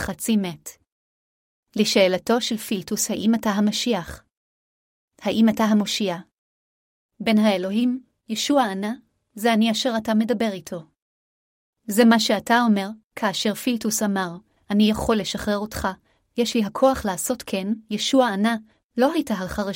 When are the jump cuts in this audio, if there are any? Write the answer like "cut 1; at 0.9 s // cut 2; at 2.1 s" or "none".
cut 1; at 14.6 s

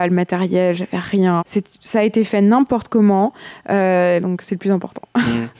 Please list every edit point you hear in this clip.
cut 1; at 1.4 s // cut 2; at 4.2 s

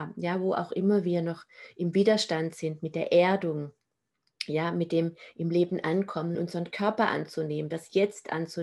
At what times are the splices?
cut 1; at 6.3 s

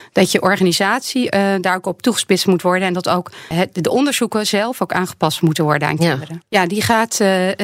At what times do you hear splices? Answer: cut 1; at 3.5 s // cut 2; at 6.4 s

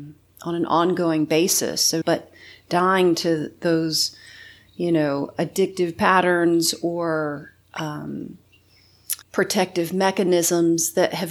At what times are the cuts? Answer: cut 1; at 2.0 s // cut 2; at 9.2 s

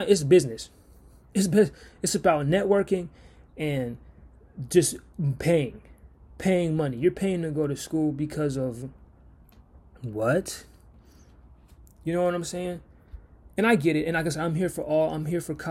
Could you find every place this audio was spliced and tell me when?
none

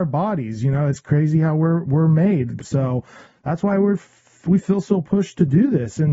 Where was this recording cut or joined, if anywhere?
cut 1; at 2.6 s

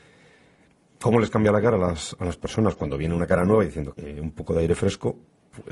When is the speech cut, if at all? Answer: cut 1; at 3.9 s

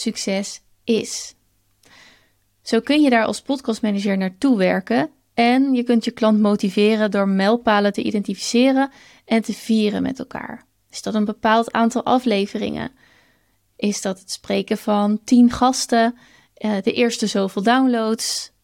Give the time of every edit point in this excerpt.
cut 1; at 13.7 s

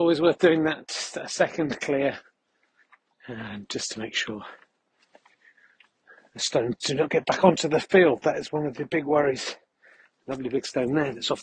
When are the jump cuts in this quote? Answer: cut 1; at 3.1 s

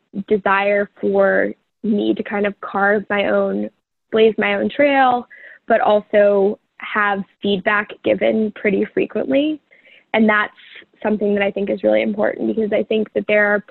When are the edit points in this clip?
cut 1; at 4.1 s // cut 2; at 7.3 s

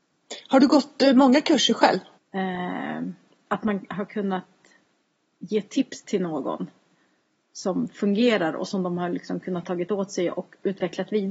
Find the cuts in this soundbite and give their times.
cut 1; at 2.2 s

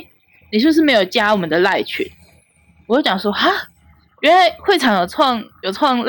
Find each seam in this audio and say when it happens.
none

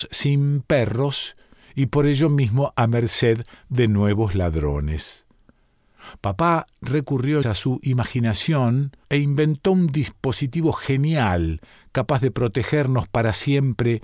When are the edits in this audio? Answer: cut 1; at 7.4 s // cut 2; at 9.0 s

